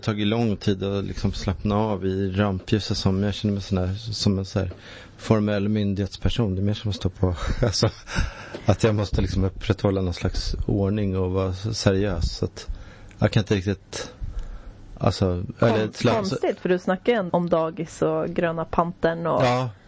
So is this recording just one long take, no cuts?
no; 1 cut; at 17.3 s

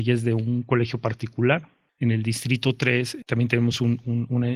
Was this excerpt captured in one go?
yes; 0 cuts

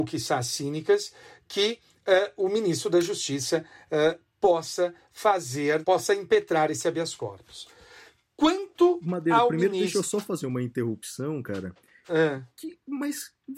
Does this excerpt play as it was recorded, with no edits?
no; 1 cut; at 5.8 s

